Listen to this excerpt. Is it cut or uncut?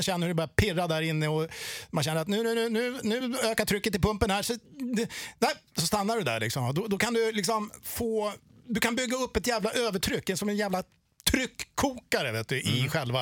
uncut